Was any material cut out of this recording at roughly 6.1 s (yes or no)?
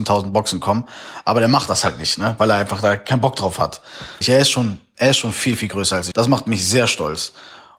yes